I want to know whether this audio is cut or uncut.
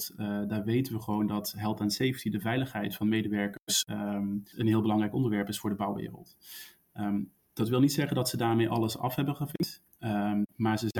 cut